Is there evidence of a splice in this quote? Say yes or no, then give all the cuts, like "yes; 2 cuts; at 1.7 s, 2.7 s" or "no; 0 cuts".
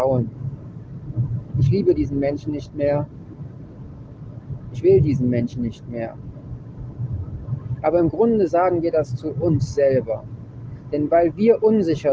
no; 0 cuts